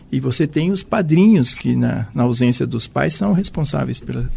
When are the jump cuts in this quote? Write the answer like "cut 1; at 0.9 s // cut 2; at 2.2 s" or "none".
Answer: none